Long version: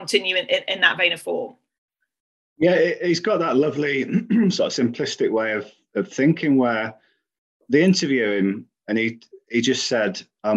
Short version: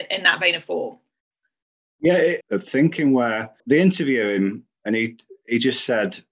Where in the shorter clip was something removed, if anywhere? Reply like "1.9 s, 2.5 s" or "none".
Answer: 2.4 s, 3.6 s